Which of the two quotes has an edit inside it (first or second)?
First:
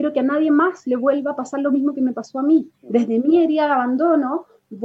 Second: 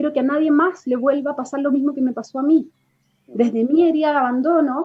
first